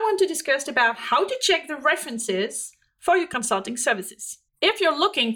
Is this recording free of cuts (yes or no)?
yes